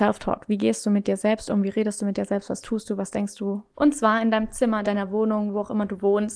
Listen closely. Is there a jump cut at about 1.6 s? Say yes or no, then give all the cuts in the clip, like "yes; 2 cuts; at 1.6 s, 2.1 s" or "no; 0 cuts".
no; 2 cuts; at 3.7 s, 4.8 s